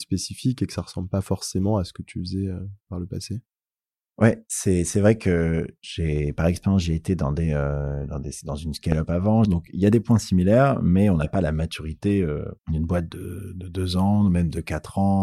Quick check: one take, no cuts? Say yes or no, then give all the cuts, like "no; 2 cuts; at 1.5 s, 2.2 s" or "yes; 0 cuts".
no; 2 cuts; at 9.5 s, 12.6 s